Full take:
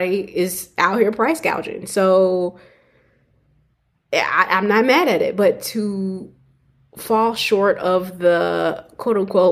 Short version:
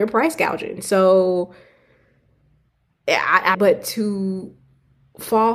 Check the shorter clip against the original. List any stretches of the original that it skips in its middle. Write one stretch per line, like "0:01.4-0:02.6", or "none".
0:04.6-0:05.3